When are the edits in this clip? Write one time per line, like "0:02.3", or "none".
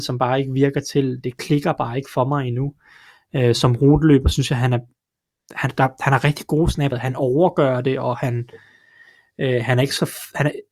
0:06.9